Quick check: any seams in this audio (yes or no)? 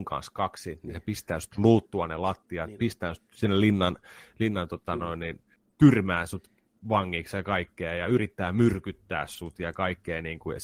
no